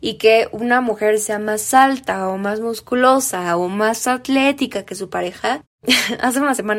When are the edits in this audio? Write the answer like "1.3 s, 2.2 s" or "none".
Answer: 5.6 s